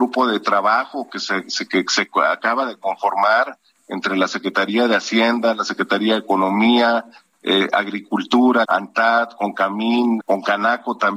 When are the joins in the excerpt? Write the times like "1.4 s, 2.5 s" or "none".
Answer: 8.6 s, 10.2 s